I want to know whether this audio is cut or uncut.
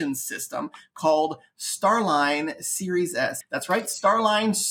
cut